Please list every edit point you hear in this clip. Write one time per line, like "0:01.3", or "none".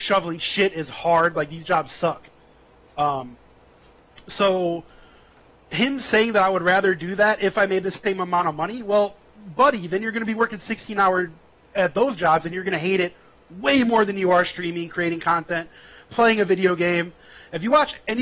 none